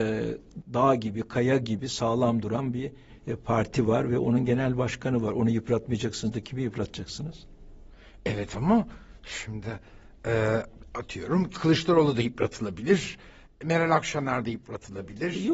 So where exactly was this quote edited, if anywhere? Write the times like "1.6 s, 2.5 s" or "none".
none

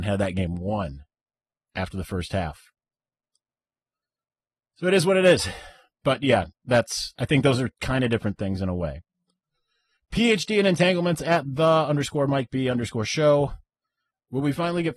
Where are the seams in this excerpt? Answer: none

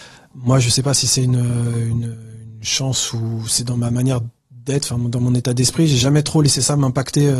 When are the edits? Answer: none

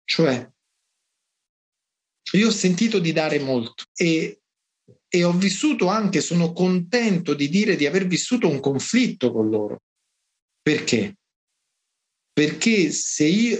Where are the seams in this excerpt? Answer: none

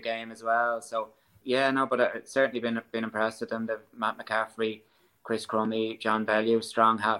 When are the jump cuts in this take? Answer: 1.4 s

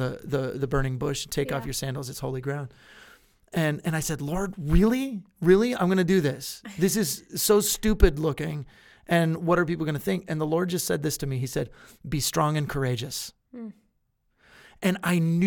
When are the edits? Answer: none

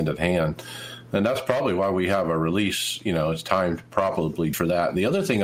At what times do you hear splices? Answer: 4.5 s

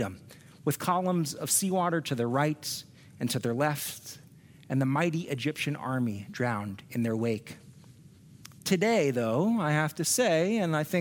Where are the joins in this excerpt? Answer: 8.6 s

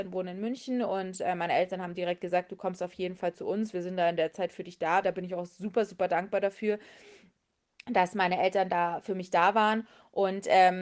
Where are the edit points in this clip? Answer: 5.0 s

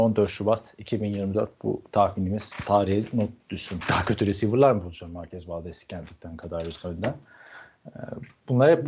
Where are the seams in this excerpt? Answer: 3.8 s

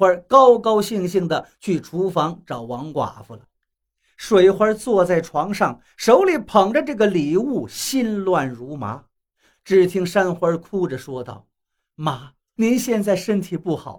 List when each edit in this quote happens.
9.5 s, 12.6 s

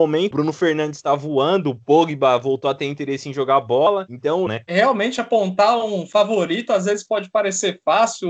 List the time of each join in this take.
4.5 s

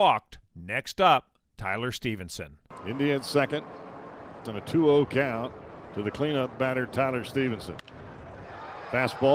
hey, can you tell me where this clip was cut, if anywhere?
4.5 s

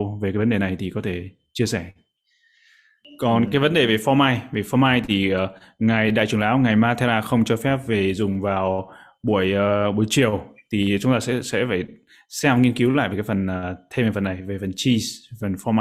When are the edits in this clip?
none

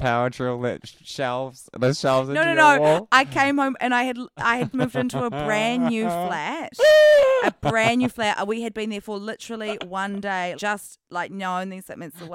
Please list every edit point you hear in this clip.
4.7 s, 10.6 s

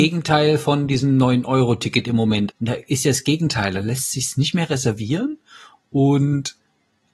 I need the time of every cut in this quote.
2.5 s

